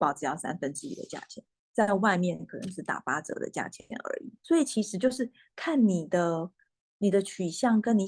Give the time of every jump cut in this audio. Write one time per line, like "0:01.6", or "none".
0:04.4